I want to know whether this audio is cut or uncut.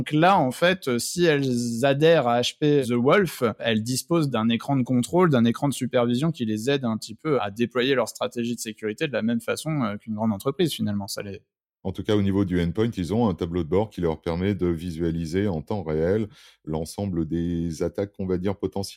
uncut